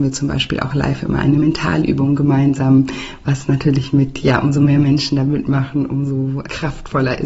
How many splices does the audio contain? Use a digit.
0